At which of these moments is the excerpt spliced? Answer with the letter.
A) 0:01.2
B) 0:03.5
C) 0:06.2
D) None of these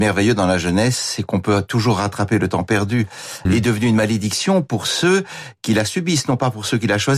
B